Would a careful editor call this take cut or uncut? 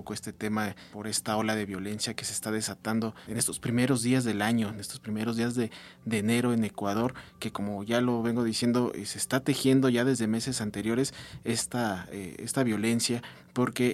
uncut